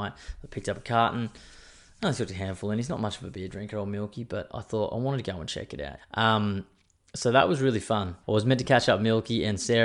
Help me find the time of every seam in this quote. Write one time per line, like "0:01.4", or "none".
0:06.0
0:08.2

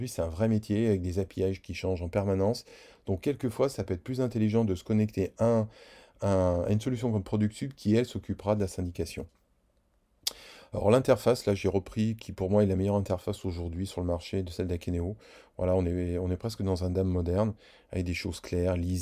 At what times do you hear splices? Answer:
none

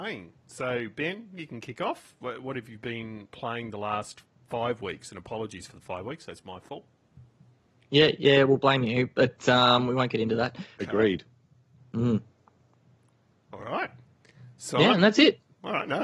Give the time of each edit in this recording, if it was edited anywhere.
0:10.8

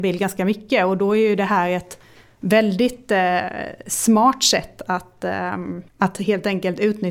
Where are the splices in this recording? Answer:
0:05.9

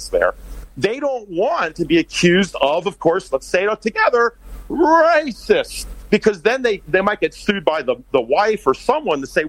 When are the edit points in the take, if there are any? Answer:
none

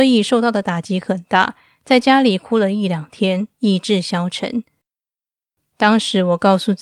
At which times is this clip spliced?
0:05.6

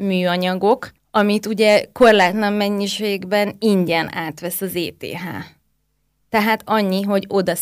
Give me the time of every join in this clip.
none

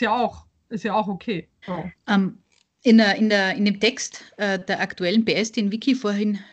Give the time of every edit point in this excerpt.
0:01.6

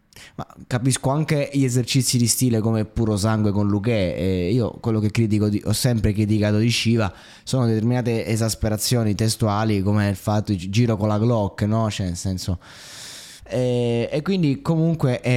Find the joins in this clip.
0:13.4

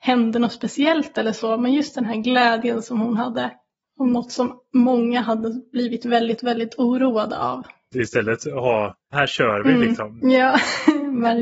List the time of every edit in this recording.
0:07.9
0:09.1
0:10.2

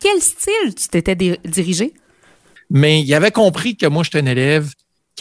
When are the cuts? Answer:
0:02.6

